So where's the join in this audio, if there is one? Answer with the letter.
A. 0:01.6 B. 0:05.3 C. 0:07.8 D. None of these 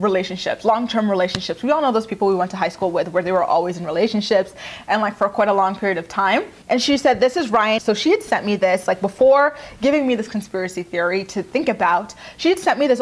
C